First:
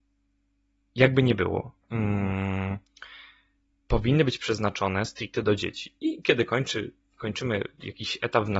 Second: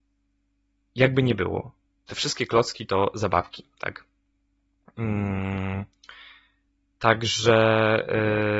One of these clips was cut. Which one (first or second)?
first